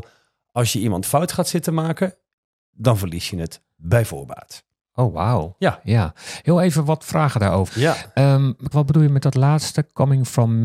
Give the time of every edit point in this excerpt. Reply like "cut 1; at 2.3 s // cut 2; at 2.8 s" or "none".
cut 1; at 7.7 s // cut 2; at 8.7 s